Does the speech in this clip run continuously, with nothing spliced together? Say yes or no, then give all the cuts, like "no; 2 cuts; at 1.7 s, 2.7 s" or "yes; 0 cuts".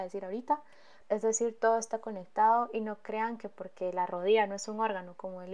no; 1 cut; at 1.0 s